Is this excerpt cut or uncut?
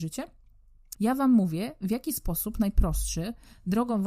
cut